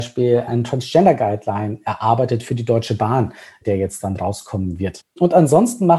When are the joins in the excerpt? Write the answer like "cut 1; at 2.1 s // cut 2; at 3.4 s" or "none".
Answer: none